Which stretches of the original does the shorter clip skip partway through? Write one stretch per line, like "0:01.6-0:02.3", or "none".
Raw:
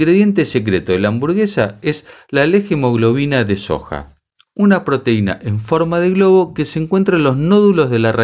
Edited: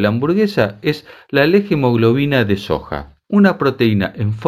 0:04.2-0:04.5